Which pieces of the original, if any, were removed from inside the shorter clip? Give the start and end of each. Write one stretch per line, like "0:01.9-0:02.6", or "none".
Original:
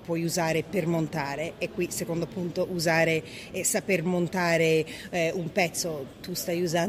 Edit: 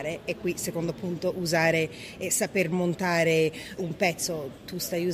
0:05.1-0:05.3